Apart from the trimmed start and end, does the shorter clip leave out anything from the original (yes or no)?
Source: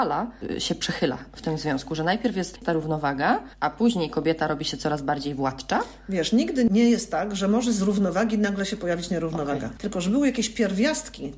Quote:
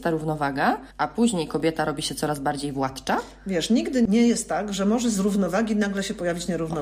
no